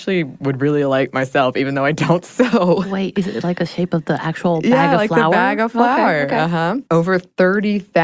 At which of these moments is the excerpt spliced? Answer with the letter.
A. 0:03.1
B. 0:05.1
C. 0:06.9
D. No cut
C